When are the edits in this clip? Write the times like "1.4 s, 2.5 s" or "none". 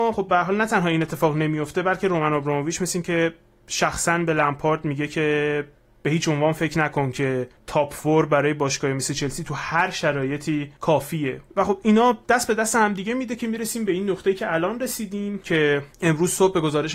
12.2 s